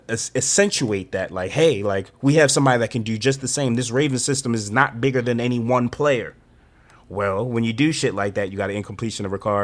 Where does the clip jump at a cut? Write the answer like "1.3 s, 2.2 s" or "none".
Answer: none